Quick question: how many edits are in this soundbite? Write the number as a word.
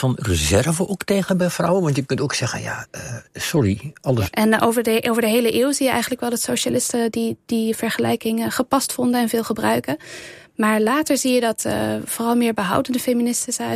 one